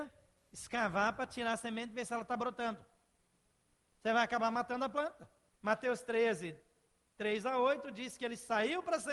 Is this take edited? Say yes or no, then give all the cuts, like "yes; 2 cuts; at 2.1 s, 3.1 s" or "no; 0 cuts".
yes; 1 cut; at 5.6 s